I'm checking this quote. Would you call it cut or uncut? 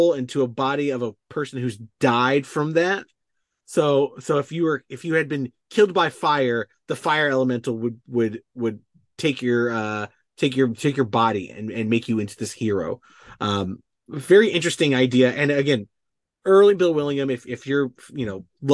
uncut